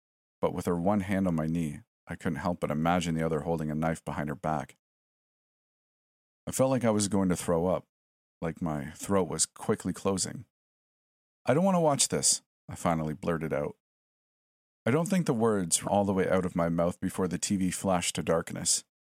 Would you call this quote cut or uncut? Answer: cut